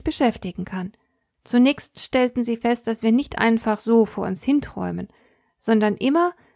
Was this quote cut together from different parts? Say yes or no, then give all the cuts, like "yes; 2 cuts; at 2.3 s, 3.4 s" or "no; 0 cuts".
yes; 1 cut; at 1.3 s